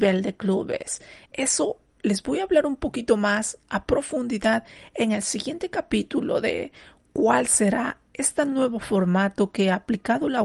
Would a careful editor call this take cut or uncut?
cut